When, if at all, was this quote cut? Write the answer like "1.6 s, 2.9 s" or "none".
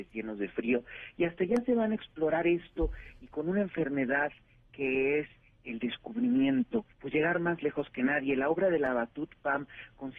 6.9 s